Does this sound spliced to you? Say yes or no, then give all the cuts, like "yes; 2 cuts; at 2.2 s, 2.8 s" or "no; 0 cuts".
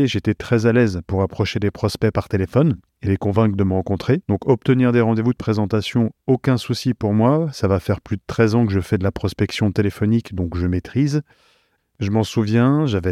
yes; 2 cuts; at 4.2 s, 11.8 s